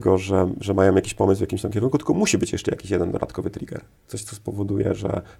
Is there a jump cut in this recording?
no; 0 cuts

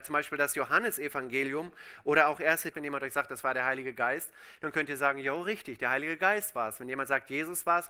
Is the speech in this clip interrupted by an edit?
yes; 1 cut; at 2.7 s

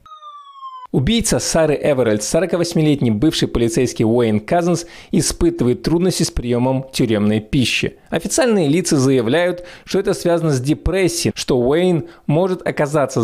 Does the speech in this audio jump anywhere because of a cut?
yes; 1 cut; at 11.3 s

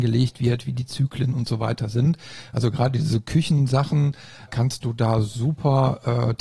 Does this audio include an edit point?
yes; 1 cut; at 4.5 s

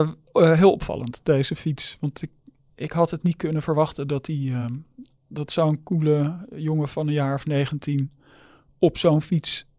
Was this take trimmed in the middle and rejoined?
no; 0 cuts

